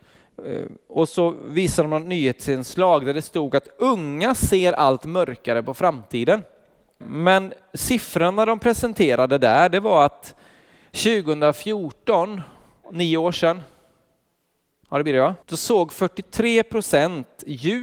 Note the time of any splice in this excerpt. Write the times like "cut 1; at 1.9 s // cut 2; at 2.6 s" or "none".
cut 1; at 7.0 s // cut 2; at 12.8 s // cut 3; at 15.4 s